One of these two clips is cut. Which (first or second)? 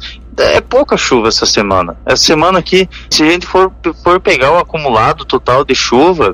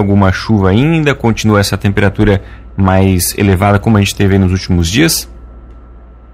first